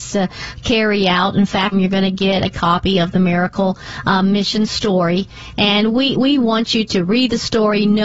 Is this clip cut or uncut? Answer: cut